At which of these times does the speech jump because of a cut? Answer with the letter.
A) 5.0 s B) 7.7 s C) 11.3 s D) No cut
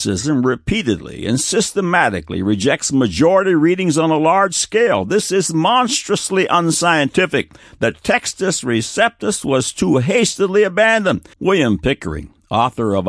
C